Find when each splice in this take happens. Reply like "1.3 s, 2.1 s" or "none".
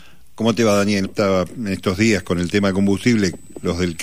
1.1 s